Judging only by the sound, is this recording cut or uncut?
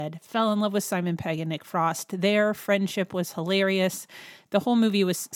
uncut